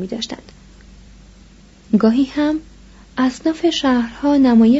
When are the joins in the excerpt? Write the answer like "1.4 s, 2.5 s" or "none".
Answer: none